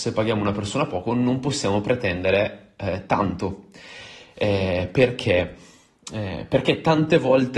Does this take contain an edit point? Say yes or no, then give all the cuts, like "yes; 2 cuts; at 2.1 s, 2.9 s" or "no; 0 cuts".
no; 0 cuts